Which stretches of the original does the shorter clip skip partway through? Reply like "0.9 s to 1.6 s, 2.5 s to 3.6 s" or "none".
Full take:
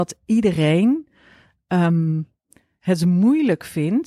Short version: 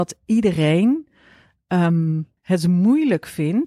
2.4 s to 2.7 s